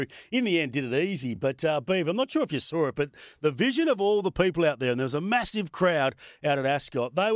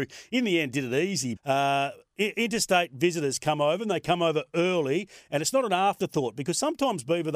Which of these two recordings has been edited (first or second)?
second